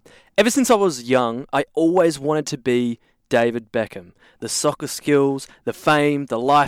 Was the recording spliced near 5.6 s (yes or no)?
no